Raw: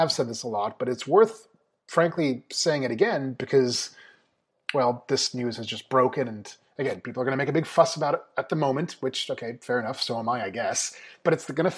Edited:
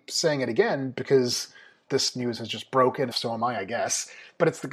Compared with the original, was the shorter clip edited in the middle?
yes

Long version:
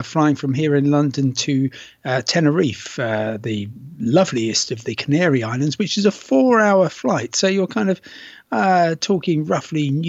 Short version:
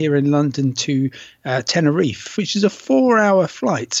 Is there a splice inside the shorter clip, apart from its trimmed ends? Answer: yes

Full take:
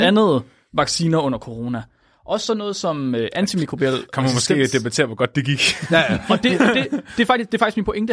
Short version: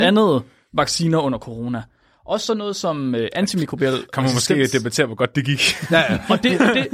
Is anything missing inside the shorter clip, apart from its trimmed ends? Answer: no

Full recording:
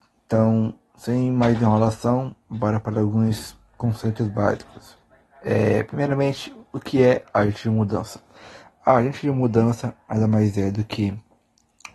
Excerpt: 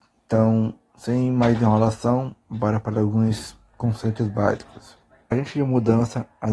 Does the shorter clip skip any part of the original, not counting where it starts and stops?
yes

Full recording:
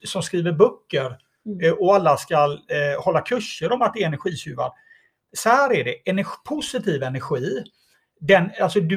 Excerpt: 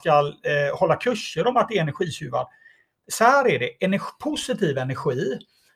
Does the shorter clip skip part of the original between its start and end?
no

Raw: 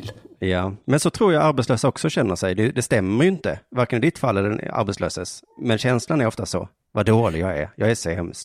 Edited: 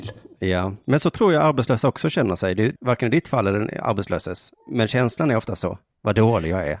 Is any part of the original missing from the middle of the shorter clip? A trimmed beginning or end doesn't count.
yes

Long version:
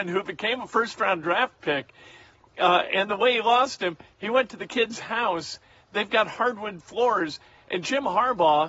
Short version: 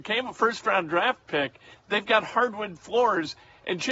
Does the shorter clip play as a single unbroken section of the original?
no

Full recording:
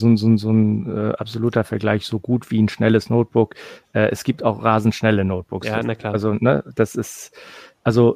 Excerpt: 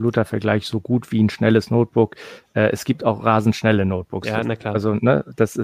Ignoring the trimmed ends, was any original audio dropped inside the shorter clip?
no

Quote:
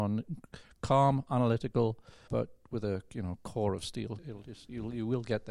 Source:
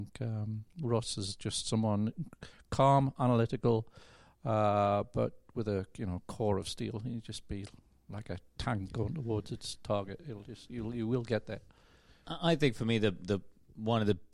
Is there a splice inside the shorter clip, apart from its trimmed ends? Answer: yes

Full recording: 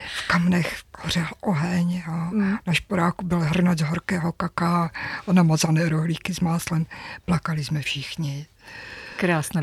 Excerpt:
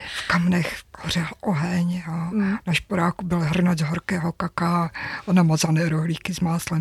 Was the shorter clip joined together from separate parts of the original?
no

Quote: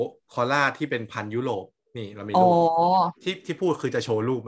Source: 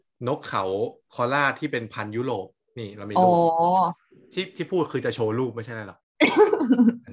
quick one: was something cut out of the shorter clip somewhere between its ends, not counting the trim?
yes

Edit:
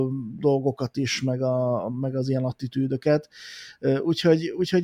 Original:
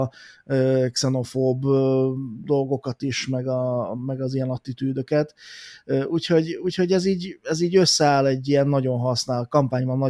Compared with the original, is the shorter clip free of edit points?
yes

